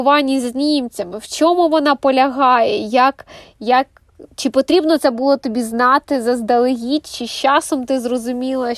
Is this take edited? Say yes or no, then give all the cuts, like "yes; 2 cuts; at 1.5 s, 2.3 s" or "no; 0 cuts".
no; 0 cuts